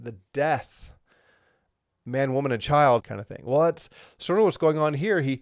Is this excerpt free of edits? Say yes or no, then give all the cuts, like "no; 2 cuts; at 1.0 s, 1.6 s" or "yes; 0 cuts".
no; 1 cut; at 3.0 s